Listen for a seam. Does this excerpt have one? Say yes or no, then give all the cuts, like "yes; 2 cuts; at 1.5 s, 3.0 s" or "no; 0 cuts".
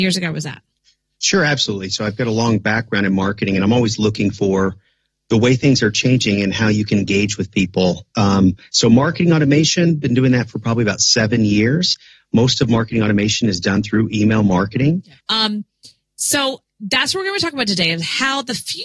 yes; 1 cut; at 15.2 s